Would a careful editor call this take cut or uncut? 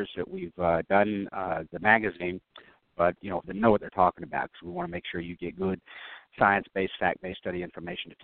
cut